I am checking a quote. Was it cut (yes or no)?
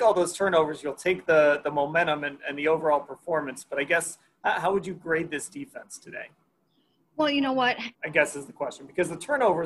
yes